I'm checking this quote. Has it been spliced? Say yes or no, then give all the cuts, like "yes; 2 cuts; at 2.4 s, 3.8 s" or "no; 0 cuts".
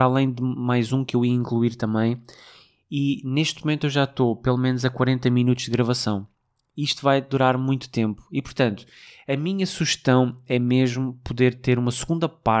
no; 0 cuts